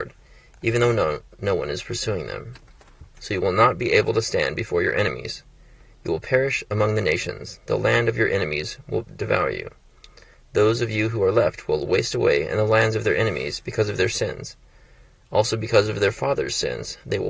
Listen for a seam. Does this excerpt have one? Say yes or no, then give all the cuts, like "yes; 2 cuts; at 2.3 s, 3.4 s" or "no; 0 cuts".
no; 0 cuts